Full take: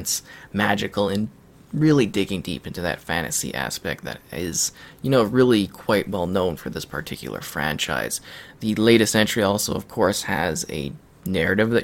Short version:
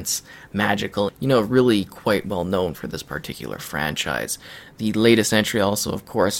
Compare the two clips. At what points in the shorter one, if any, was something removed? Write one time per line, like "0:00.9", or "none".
0:01.1